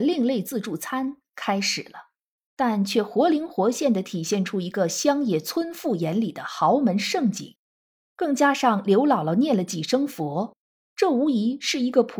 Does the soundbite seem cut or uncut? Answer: cut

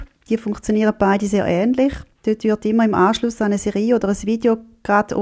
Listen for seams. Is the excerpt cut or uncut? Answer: cut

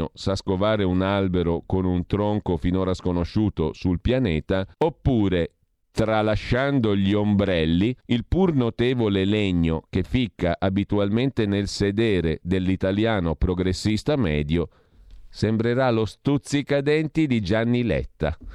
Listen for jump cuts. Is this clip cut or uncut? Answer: cut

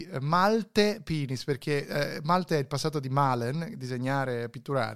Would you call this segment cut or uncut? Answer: uncut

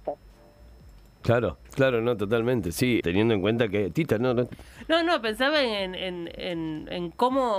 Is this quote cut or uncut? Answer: cut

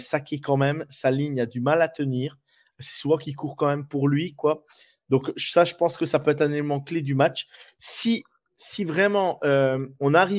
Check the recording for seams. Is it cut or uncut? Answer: uncut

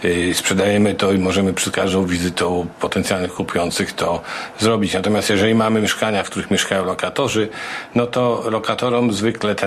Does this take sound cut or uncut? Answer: uncut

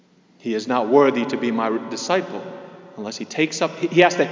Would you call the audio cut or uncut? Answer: uncut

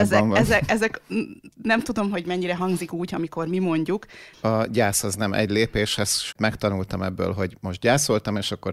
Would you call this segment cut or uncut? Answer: cut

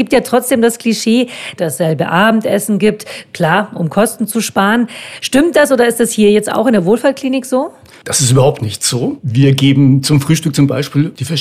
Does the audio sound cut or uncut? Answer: cut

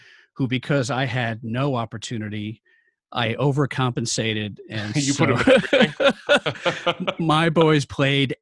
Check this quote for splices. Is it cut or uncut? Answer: uncut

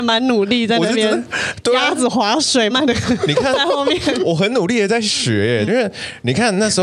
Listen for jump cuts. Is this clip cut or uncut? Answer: cut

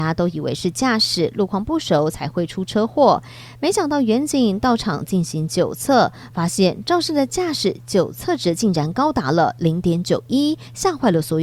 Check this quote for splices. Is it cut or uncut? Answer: uncut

